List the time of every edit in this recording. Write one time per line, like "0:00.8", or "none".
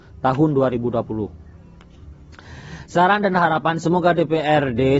none